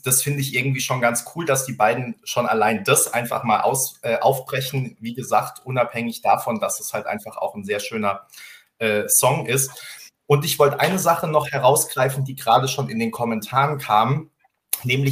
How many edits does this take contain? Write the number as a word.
zero